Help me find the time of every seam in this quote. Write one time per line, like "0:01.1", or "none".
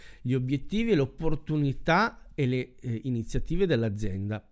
none